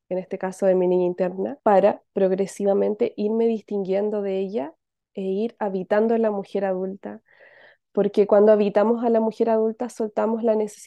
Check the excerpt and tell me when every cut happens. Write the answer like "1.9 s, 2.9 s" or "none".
1.6 s